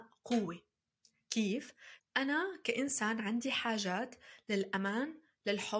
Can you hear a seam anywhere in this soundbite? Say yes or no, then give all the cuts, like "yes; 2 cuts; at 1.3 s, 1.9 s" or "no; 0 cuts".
yes; 1 cut; at 2.0 s